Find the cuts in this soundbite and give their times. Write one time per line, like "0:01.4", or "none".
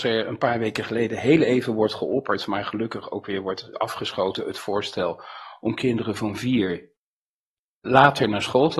0:03.7